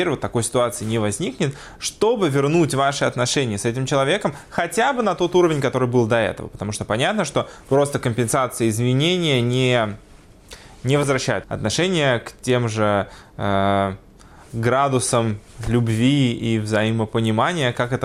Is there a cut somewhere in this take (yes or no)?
yes